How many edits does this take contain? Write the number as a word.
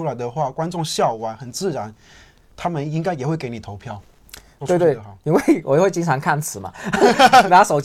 one